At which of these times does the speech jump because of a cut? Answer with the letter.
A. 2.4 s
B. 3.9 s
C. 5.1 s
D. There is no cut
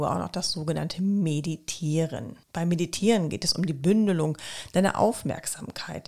A